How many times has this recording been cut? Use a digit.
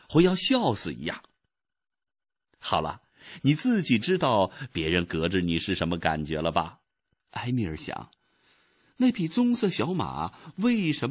1